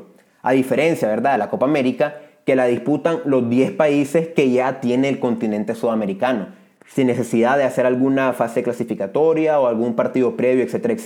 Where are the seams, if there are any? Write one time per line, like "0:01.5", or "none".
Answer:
none